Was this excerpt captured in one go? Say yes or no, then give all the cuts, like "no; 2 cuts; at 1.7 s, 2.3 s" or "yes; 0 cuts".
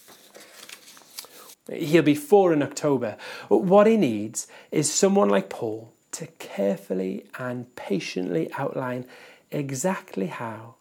no; 2 cuts; at 1.5 s, 6.0 s